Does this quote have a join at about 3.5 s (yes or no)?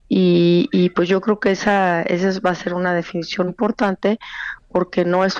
yes